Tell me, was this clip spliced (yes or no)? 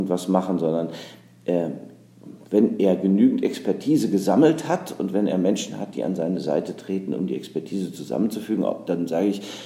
no